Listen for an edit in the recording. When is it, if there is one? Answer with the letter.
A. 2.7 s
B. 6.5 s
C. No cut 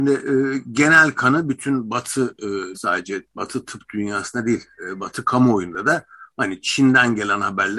A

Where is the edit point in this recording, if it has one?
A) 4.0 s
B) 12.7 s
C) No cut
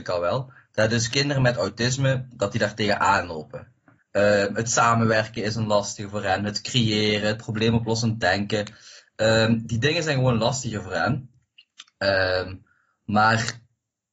A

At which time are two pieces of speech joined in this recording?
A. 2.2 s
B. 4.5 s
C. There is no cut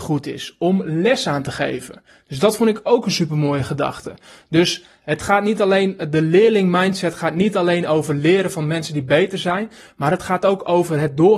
C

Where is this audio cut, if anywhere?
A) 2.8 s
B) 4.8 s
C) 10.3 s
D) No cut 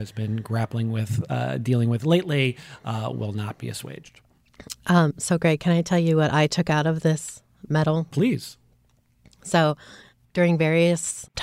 D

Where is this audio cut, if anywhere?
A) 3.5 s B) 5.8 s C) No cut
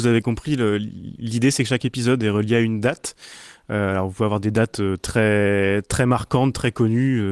C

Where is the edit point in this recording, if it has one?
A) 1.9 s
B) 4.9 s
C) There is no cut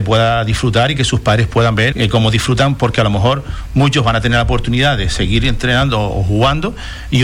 A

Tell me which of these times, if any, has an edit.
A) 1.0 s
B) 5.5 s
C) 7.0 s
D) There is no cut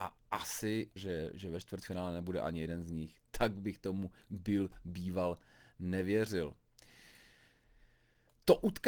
A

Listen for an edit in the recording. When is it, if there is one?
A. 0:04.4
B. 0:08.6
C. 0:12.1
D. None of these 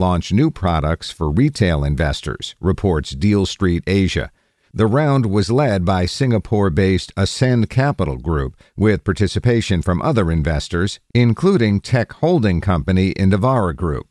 D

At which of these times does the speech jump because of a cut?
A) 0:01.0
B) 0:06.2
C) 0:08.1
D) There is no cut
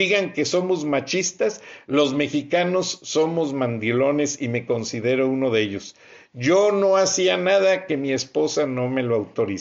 D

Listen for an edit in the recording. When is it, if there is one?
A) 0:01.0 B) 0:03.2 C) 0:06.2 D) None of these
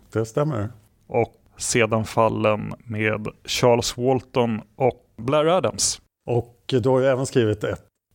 C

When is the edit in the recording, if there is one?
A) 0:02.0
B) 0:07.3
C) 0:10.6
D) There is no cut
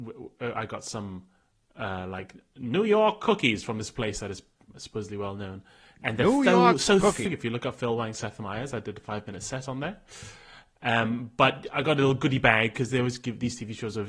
B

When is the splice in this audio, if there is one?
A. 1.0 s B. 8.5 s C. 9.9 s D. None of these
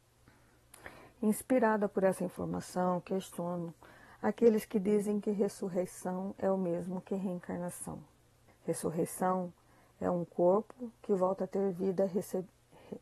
B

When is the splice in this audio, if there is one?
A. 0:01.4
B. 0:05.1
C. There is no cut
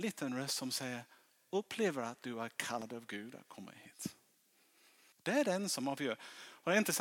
B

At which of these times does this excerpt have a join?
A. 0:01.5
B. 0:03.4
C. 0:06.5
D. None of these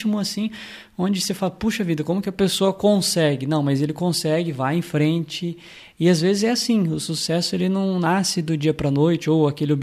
D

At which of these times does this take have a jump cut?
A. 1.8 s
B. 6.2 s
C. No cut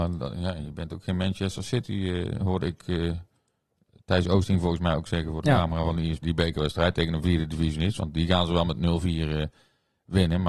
B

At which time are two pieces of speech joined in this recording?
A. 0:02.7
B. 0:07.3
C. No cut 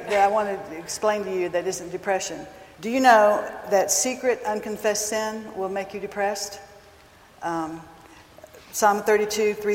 A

